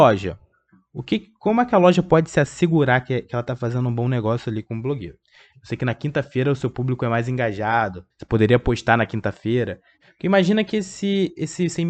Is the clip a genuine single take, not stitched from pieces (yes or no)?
no